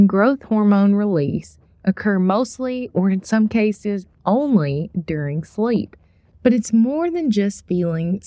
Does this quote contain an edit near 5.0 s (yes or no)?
no